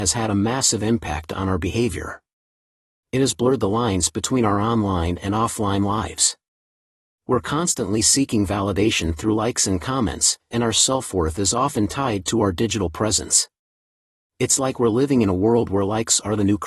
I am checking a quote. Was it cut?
no; 0 cuts

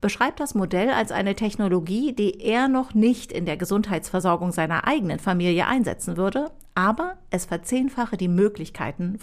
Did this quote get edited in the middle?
no; 0 cuts

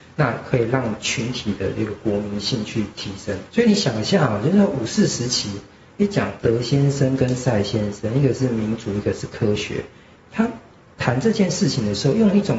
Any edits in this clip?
yes; 1 cut; at 3.5 s

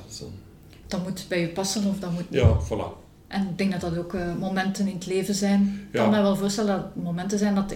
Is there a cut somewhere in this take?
no; 0 cuts

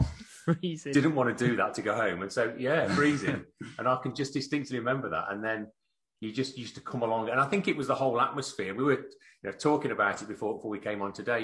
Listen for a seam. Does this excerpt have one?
no; 0 cuts

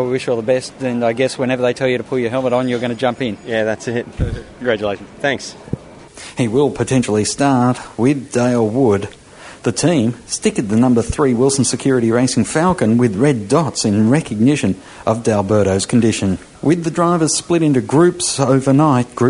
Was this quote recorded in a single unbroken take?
yes; 0 cuts

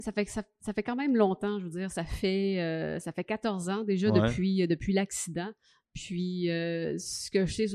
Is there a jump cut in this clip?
no; 0 cuts

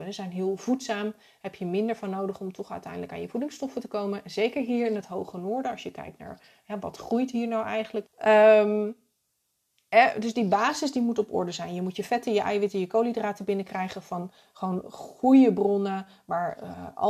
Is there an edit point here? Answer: yes; 1 cut; at 8.1 s

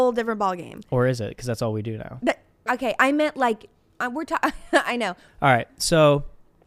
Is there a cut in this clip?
no; 0 cuts

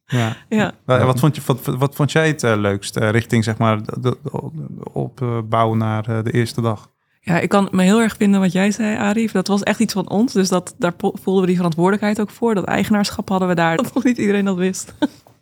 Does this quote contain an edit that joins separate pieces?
yes; 2 cuts; at 9.4 s, 13.8 s

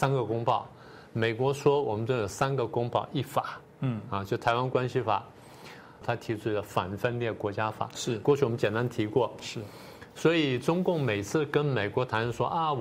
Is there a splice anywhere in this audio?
yes; 2 cuts; at 6.0 s, 9.4 s

